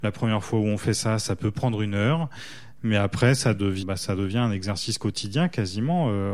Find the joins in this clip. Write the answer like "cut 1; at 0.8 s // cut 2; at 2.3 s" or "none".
cut 1; at 3.8 s